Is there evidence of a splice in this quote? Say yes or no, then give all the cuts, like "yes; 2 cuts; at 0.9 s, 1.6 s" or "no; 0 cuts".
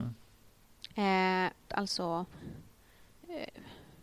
yes; 1 cut; at 1.7 s